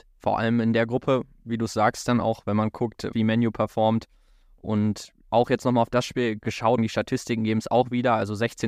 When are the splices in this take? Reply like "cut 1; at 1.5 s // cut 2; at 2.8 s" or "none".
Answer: cut 1; at 3.1 s // cut 2; at 6.8 s